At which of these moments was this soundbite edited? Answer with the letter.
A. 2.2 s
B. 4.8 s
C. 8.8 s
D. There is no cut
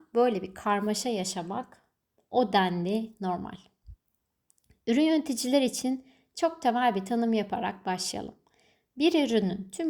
D